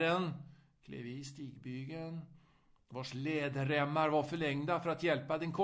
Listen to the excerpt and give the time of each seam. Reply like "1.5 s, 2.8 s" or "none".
none